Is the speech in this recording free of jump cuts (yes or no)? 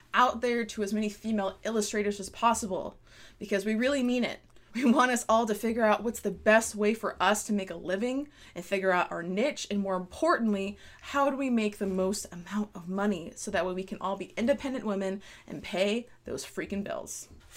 no